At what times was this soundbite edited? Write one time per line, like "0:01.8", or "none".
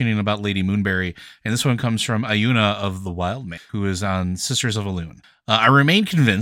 0:03.7

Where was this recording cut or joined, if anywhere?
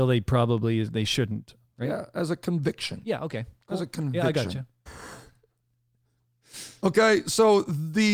0:04.9

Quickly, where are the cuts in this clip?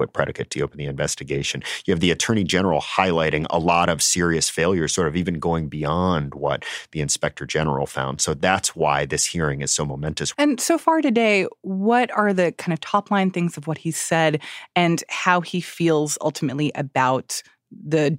0:10.3

